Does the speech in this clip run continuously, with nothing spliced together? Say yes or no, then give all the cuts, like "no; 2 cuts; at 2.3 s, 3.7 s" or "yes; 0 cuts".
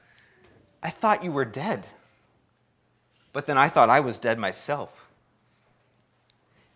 yes; 0 cuts